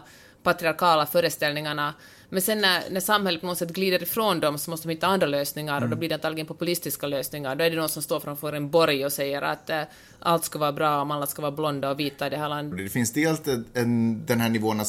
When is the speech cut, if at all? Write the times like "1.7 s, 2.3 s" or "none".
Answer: 12.7 s